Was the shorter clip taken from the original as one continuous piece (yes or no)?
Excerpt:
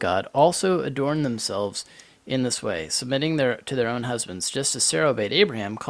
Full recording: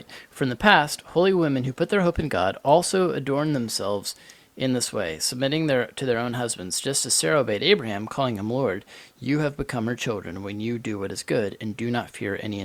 yes